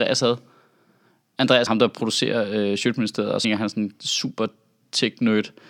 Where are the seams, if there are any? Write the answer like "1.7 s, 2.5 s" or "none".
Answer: 1.7 s, 3.4 s